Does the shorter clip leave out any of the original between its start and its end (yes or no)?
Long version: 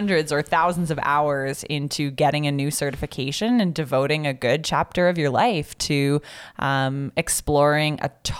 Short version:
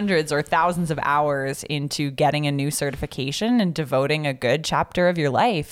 no